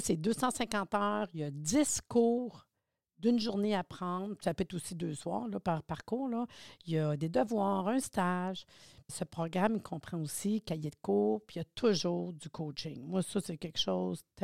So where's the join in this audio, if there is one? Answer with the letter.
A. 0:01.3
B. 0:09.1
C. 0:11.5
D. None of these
B